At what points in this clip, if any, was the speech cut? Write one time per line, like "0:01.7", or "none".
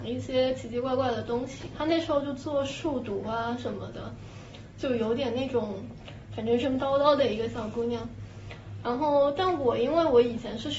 0:06.6
0:08.8